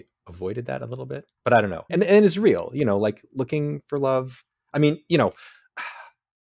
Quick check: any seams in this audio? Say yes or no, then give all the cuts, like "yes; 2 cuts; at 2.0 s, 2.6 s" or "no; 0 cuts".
yes; 1 cut; at 1.9 s